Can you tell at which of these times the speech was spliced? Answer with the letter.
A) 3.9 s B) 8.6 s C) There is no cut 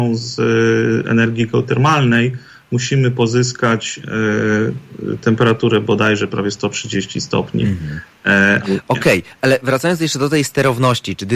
B